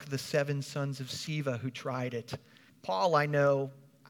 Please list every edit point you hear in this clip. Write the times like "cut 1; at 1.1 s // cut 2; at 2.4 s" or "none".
cut 1; at 2.7 s